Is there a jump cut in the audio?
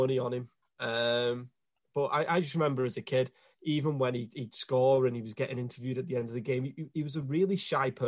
no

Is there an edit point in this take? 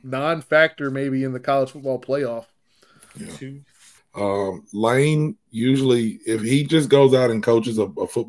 yes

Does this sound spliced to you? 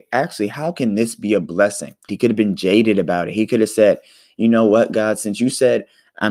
yes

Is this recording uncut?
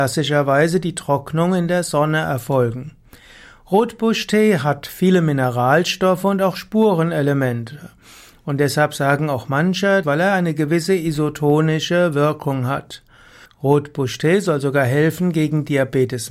no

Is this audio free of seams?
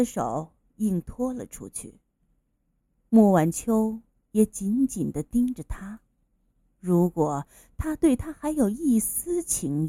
no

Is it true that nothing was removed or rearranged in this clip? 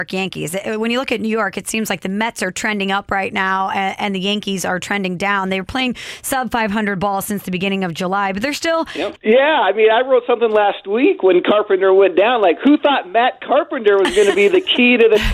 no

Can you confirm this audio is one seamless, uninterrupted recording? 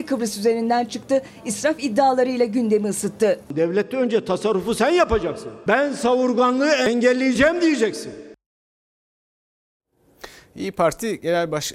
yes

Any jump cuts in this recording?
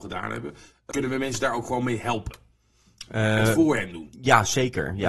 yes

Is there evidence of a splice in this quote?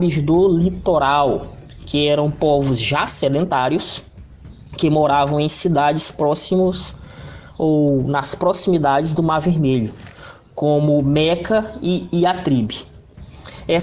no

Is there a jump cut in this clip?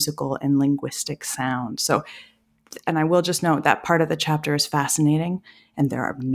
no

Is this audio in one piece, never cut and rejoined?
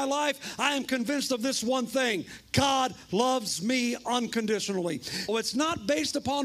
no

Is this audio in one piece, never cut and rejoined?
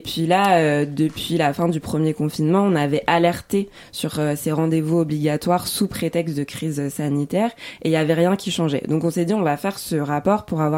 yes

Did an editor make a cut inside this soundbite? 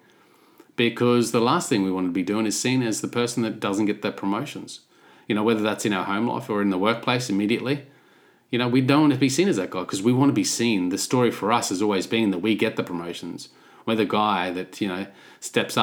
no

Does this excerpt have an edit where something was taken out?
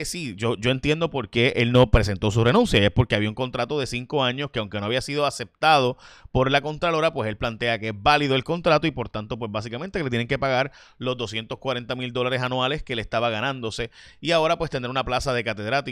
no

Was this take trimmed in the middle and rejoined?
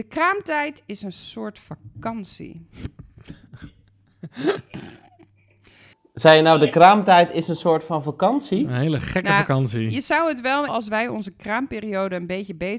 yes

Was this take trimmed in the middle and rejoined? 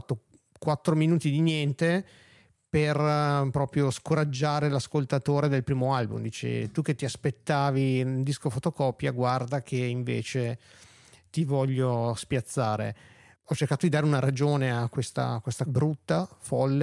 yes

